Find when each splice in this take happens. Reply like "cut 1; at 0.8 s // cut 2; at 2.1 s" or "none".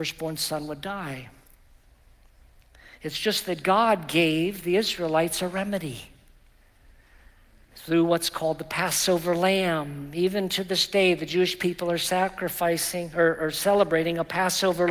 none